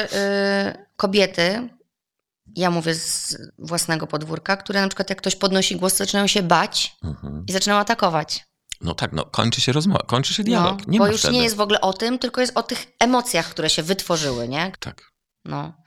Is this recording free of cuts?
no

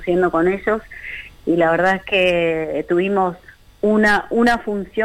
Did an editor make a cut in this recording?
no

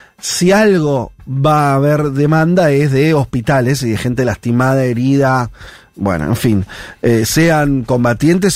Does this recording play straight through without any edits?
yes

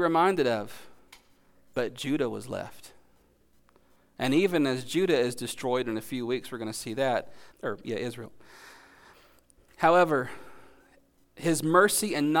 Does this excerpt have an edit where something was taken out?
yes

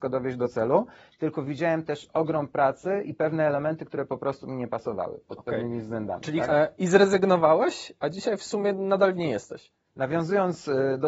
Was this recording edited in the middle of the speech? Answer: yes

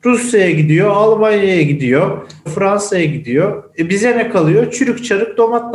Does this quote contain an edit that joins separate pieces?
yes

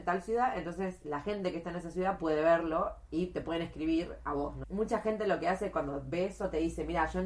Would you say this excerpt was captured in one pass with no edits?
no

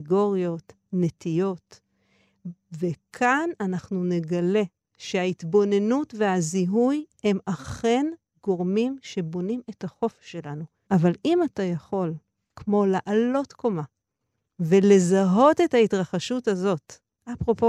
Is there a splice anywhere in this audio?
yes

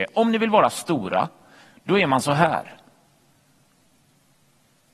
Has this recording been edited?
no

